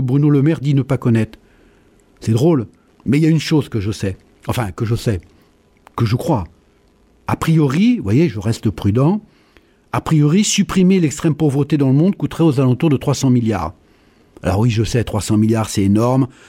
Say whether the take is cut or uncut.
cut